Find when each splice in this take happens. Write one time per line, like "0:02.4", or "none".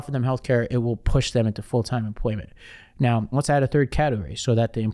0:03.3